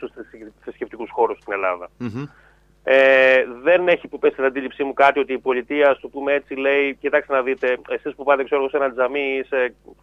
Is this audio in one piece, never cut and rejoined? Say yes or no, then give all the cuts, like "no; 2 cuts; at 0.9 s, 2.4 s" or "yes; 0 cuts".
yes; 0 cuts